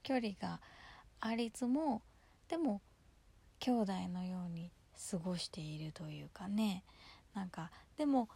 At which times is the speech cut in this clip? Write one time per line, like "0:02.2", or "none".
0:01.5